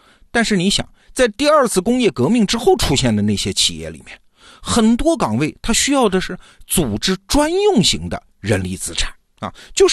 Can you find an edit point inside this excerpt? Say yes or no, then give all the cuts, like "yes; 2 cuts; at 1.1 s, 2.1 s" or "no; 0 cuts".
no; 0 cuts